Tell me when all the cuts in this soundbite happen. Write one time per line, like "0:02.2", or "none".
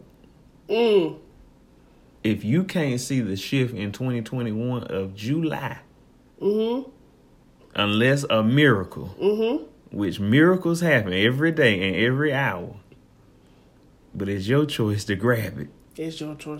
0:07.6